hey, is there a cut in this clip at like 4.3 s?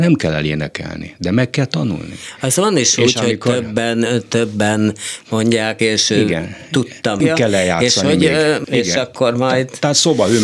no; 3 cuts; at 5.8 s, 7.2 s, 8.6 s

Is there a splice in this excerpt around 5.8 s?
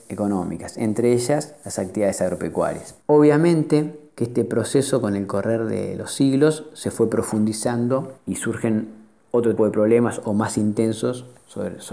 no; 2 cuts; at 3.0 s, 9.6 s

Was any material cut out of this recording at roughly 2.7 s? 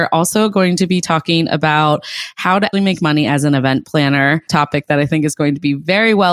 yes; 1 cut; at 2.7 s

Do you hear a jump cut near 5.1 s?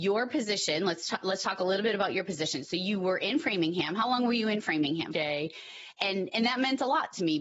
yes; 1 cut; at 5.1 s

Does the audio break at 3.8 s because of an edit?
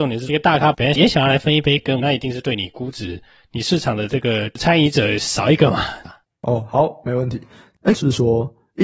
no; 3 cuts; at 2.0 s, 6.0 s, 7.9 s

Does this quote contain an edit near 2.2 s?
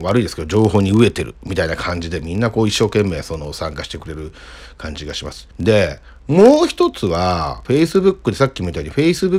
no; 2 cuts; at 5.5 s, 7.7 s

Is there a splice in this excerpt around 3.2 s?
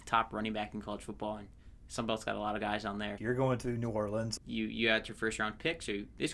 yes; 2 cuts; at 3.2 s, 4.4 s

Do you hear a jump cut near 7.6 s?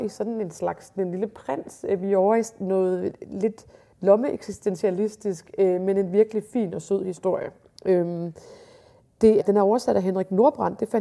no; 1 cut; at 9.4 s

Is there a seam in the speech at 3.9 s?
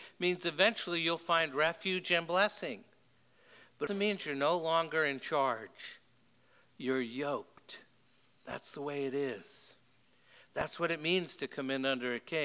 yes; 1 cut; at 3.9 s

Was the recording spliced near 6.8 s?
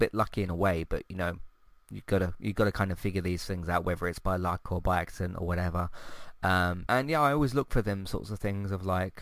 yes; 1 cut; at 6.8 s

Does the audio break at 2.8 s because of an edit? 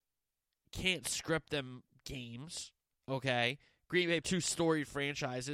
no; 1 cut; at 4.2 s

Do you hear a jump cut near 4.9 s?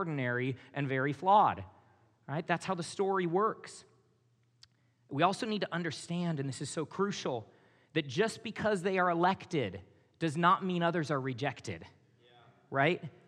no; 0 cuts

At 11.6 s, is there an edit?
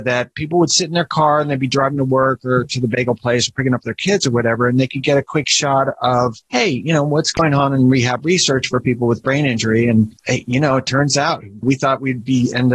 yes; 1 cut; at 11.6 s

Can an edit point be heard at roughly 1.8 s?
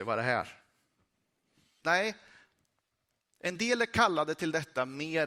yes; 1 cut; at 1.8 s

